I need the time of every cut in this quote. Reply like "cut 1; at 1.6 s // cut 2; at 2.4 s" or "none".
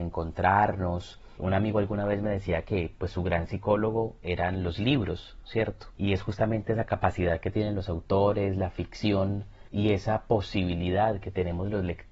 none

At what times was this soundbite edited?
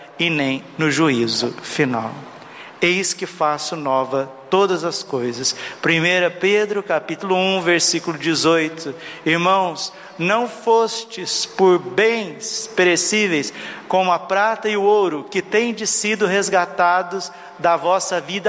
none

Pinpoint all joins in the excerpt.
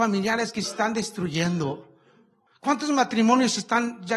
cut 1; at 2.5 s

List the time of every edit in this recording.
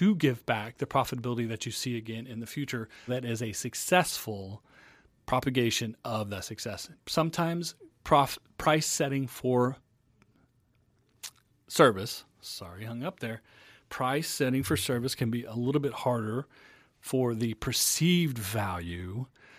cut 1; at 3.1 s // cut 2; at 7.0 s

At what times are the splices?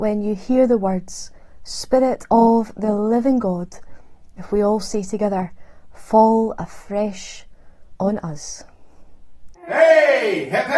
cut 1; at 9.5 s

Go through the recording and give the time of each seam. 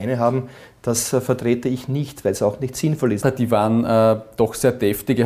cut 1; at 3.2 s

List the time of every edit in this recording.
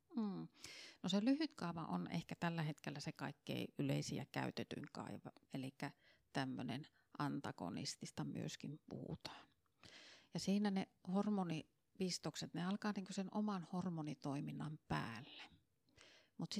cut 1; at 5.4 s

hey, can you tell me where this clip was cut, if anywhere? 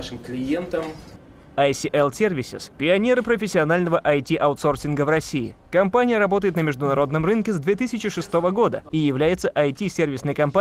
none

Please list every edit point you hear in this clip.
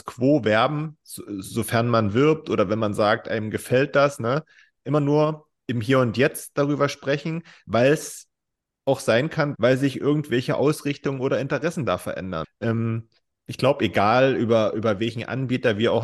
cut 1; at 9.5 s // cut 2; at 12.4 s

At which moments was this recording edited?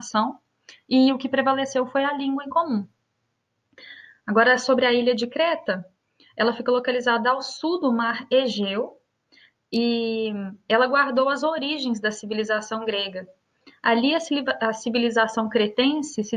none

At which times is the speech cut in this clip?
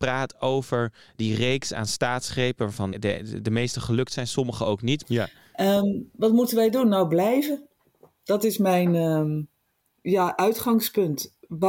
cut 1; at 2.9 s // cut 2; at 5.0 s // cut 3; at 10.0 s

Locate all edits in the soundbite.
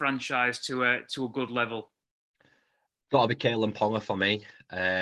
none

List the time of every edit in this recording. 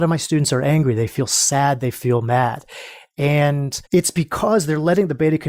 cut 1; at 3.8 s

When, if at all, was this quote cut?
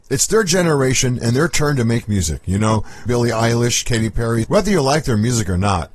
cut 1; at 3.1 s // cut 2; at 4.4 s

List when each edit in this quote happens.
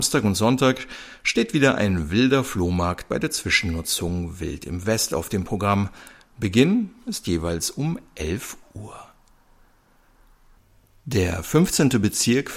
none

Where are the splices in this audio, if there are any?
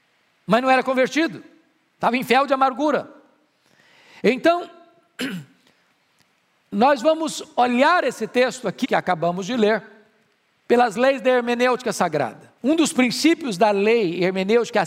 cut 1; at 8.8 s // cut 2; at 12.6 s

